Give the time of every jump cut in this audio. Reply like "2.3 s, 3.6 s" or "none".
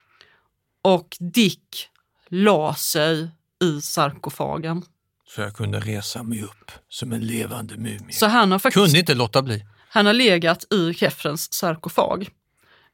none